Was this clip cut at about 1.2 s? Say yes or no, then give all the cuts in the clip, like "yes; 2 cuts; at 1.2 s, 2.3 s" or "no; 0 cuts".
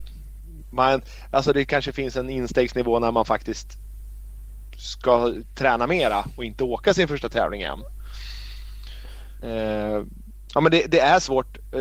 no; 2 cuts; at 9.4 s, 10.5 s